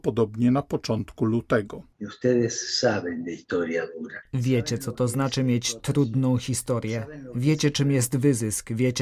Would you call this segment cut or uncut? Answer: uncut